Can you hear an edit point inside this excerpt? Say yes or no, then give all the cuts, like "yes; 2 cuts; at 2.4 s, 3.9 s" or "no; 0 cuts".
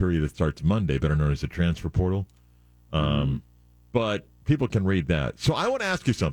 no; 0 cuts